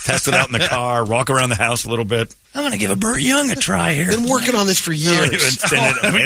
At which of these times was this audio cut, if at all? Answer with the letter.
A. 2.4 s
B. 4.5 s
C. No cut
A